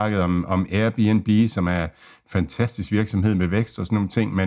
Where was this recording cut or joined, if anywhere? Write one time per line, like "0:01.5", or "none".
none